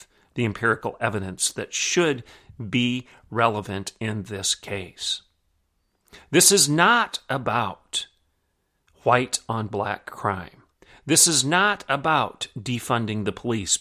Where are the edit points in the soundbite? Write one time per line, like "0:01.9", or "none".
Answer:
none

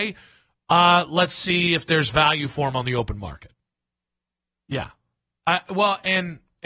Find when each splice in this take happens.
0:04.6

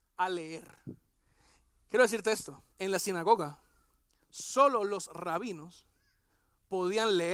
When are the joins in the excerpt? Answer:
0:02.7

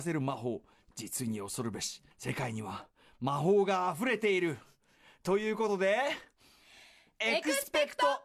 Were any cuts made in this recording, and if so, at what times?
0:02.1

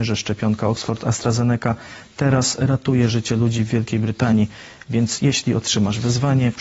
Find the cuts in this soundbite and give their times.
none

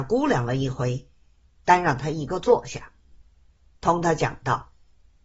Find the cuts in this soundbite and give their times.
none

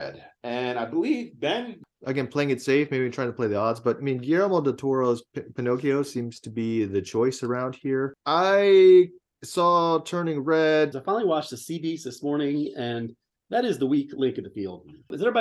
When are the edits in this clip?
0:10.9

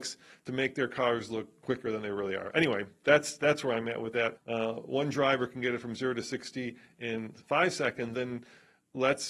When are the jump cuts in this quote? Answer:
0:04.4
0:08.1

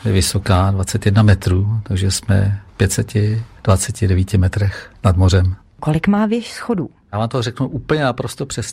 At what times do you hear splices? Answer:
none

